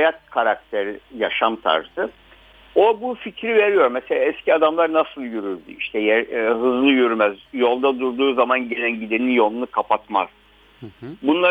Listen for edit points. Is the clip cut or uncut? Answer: uncut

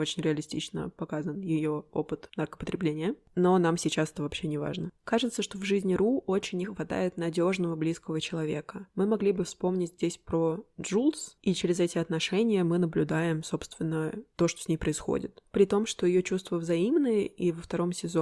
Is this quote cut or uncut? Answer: uncut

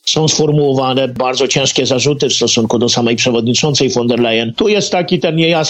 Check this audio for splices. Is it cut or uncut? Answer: uncut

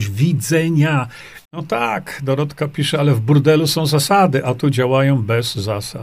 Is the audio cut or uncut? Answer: cut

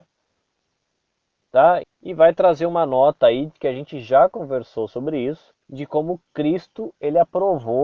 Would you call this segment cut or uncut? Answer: cut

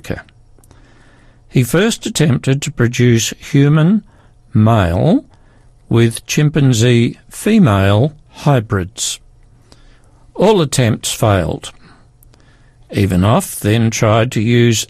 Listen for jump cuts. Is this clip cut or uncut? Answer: uncut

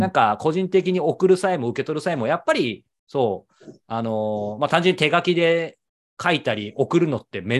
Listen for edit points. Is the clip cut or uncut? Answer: uncut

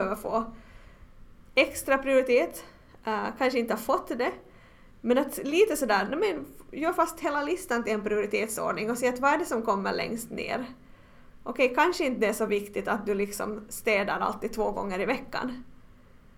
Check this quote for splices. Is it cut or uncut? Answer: uncut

